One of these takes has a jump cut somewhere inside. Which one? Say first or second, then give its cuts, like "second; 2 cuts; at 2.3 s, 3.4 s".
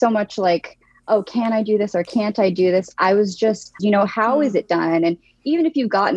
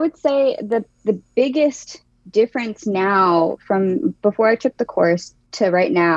first; 1 cut; at 3.8 s